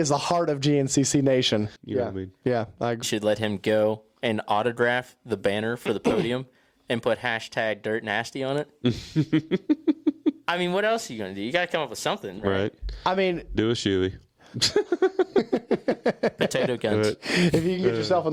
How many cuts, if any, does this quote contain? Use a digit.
3